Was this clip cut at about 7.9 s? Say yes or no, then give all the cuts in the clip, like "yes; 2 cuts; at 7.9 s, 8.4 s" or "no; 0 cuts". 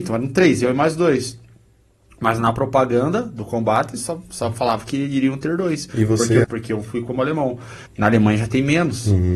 yes; 2 cuts; at 6.4 s, 7.9 s